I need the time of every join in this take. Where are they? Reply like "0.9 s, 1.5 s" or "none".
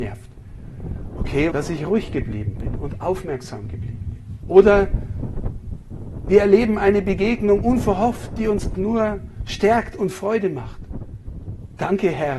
1.5 s, 4.4 s, 8.7 s